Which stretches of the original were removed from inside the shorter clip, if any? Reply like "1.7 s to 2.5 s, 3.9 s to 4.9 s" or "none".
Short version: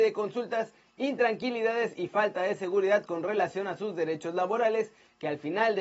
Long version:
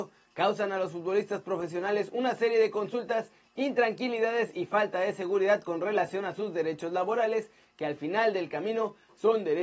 none

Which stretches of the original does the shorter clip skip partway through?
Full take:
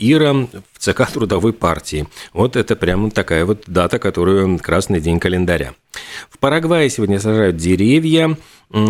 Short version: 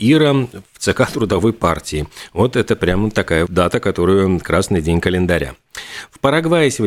3.5 s to 3.6 s

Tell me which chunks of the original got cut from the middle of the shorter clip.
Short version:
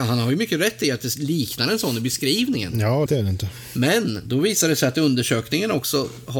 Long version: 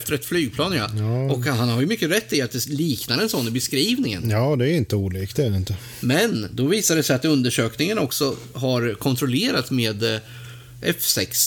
4.6 s to 5.3 s

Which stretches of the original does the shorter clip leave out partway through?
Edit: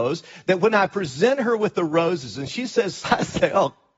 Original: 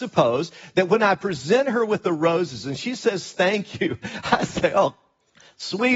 3.3 s to 4.2 s

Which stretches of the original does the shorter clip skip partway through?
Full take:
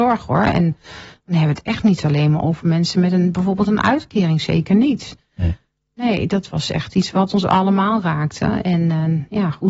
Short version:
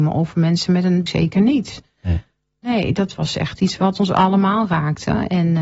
3.3 s to 4.4 s

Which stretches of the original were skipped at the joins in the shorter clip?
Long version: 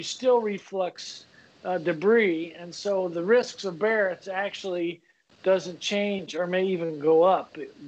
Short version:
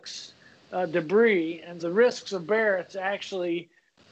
2.7 s to 3.1 s

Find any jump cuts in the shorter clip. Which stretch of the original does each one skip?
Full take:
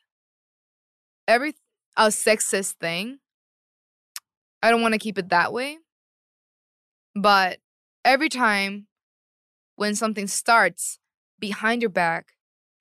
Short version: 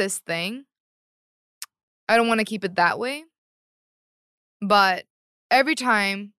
none

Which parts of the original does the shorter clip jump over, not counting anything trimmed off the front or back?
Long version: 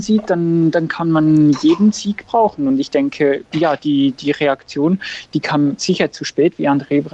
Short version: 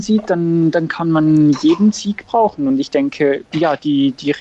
none

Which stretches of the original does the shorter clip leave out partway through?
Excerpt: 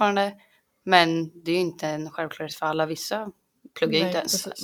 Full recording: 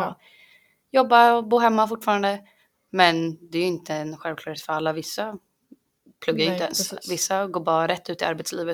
5.8 s to 6.2 s

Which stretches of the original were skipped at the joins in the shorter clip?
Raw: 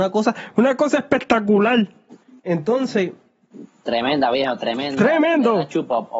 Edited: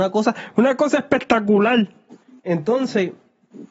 none

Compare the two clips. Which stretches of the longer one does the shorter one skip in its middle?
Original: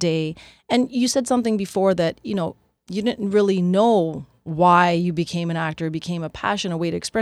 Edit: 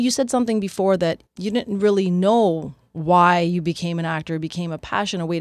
2.2 s to 2.7 s

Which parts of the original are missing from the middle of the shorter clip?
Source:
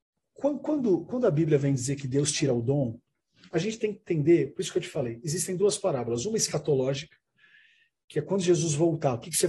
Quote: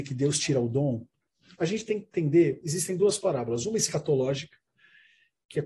4.5 s to 5.2 s

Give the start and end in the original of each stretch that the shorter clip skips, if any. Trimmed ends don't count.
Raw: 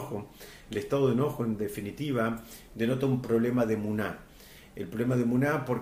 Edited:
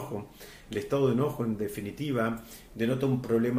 none

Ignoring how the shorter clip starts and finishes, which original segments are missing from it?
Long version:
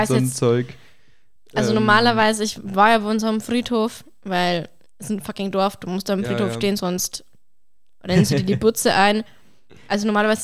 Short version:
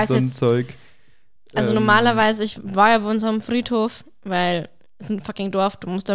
none

